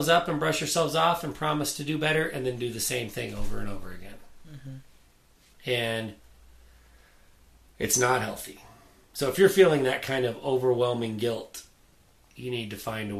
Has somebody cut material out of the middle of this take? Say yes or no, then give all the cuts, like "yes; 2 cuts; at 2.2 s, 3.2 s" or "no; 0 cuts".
yes; 1 cut; at 5.5 s